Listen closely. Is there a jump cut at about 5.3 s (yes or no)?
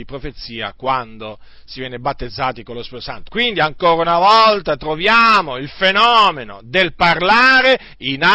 no